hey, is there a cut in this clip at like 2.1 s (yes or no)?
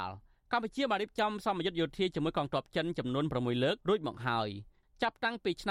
no